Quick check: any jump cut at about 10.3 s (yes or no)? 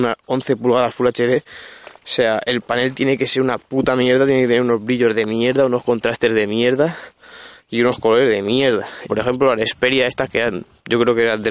no